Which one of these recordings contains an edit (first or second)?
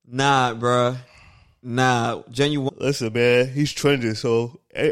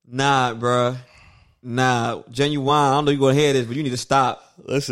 first